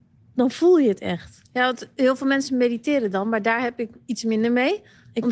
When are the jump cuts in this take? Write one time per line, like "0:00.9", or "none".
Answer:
none